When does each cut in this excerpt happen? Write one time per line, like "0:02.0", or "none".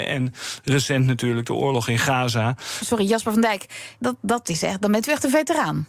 0:02.8
0:04.0